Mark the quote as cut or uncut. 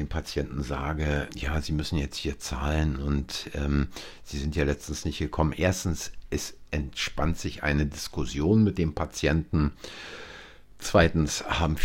cut